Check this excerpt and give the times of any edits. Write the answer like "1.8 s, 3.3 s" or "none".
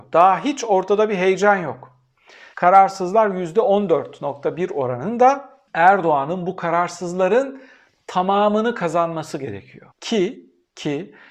2.5 s, 5.7 s, 9.9 s

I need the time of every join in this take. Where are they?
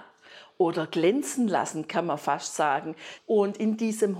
3.2 s

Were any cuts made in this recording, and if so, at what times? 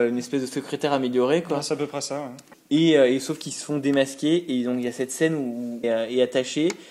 2.5 s, 5.8 s

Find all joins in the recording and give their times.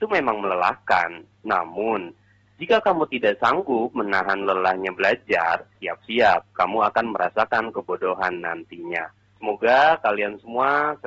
9.4 s

